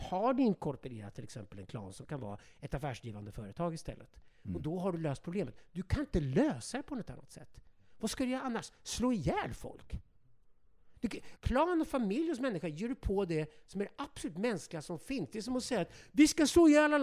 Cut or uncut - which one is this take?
cut